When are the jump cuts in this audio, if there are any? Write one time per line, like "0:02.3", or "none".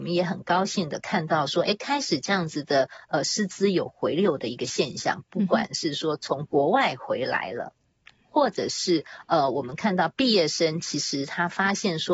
none